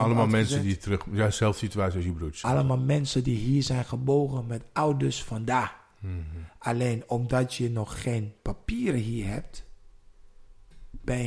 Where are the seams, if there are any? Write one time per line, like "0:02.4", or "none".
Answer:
none